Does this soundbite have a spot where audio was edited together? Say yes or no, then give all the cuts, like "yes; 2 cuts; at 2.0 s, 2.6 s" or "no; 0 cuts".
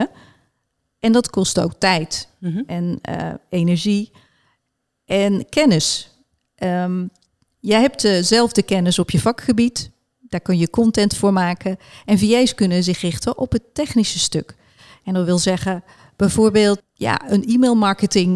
yes; 1 cut; at 16.8 s